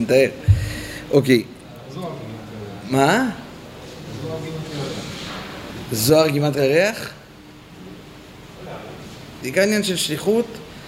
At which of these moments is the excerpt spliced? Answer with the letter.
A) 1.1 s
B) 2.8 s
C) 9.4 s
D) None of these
C